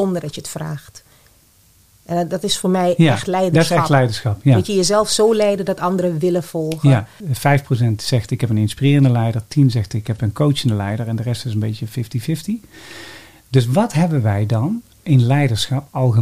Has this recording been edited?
yes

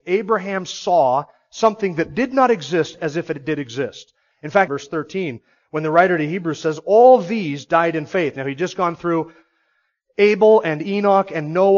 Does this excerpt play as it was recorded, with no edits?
no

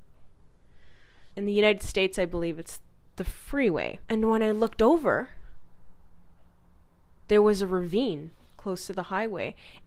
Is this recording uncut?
no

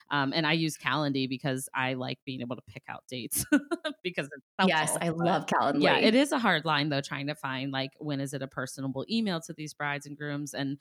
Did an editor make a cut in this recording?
no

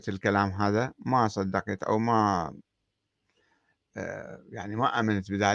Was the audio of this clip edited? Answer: no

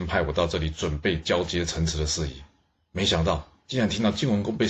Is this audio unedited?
yes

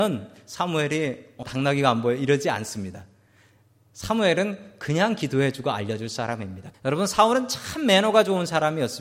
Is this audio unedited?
no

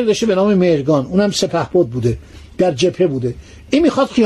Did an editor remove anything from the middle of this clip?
no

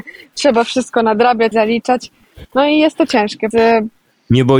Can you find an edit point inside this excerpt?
yes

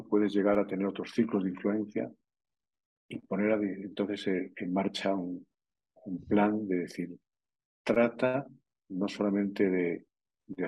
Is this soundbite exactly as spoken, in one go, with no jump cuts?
yes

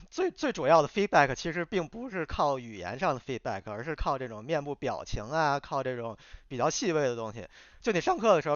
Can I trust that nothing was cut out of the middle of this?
yes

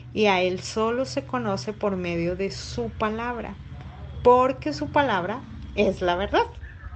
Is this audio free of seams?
yes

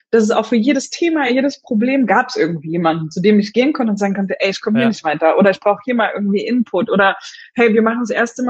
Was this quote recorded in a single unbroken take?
yes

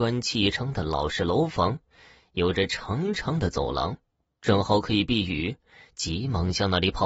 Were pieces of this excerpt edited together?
no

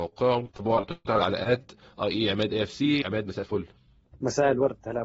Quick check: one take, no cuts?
yes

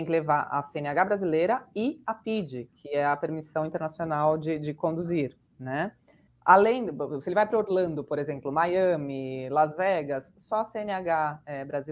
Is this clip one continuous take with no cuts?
no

